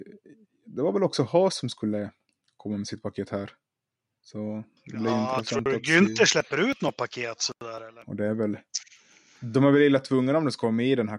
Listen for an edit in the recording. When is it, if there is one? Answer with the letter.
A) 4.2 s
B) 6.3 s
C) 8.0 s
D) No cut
C